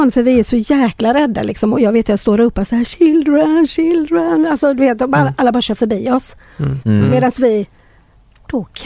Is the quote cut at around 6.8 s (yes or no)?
yes